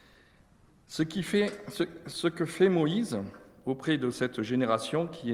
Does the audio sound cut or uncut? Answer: uncut